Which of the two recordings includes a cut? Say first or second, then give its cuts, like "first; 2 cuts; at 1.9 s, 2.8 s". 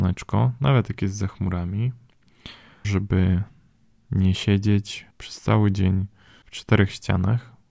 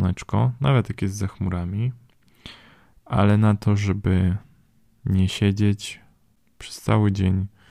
first; 2 cuts; at 2.8 s, 5.1 s